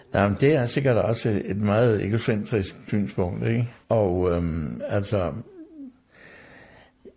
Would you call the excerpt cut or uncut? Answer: cut